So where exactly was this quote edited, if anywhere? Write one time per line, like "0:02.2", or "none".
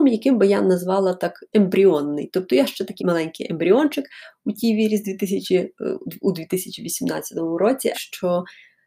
0:03.0
0:07.9